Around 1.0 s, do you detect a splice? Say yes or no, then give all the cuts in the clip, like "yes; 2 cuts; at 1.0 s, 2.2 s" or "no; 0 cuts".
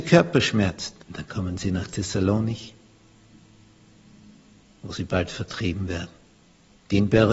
yes; 1 cut; at 1.0 s